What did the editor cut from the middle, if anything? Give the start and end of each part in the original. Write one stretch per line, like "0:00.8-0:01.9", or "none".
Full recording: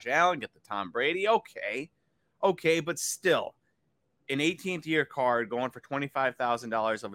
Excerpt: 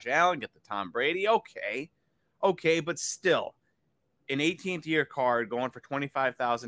none

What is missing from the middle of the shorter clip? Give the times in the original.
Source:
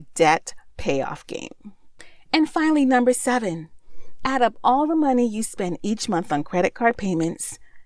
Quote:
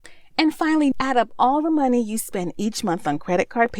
0:02.9-0:04.2

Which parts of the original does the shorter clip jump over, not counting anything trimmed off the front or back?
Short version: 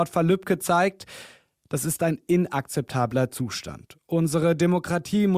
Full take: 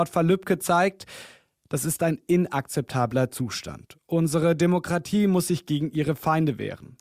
none

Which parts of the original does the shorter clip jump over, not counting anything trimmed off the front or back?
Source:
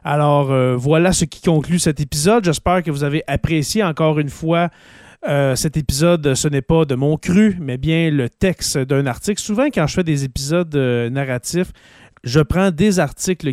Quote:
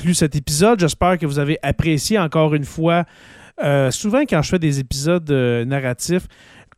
0:05.6-0:09.4

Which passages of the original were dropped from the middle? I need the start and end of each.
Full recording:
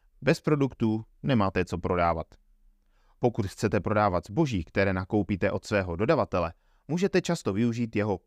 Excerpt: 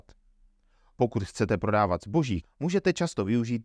0:04.6-0:06.7

